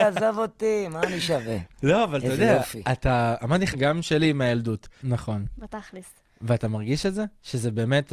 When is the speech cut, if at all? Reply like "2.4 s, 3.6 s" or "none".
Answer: 3.7 s, 5.0 s